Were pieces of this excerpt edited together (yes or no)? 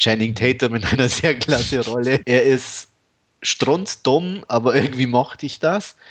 yes